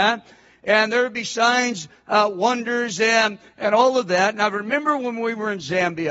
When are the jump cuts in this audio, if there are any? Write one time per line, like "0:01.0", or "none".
none